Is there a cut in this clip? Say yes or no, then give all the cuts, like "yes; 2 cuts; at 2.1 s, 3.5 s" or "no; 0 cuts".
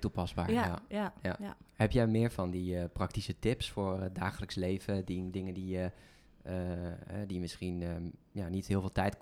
yes; 1 cut; at 1.7 s